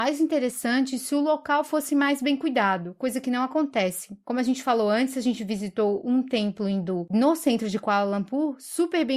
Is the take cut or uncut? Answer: uncut